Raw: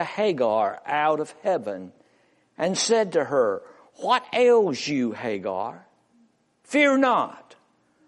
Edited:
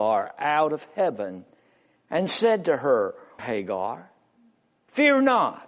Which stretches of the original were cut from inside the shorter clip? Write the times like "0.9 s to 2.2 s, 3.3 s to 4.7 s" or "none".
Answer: 3.9 s to 5.1 s